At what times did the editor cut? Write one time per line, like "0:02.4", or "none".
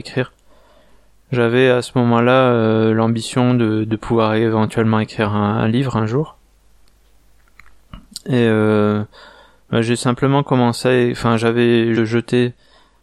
0:12.0